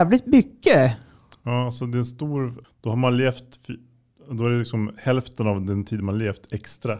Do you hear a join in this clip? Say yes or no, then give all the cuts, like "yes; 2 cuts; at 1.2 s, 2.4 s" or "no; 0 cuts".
yes; 1 cut; at 2.6 s